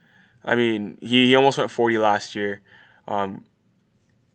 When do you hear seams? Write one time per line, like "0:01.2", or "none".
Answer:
0:01.7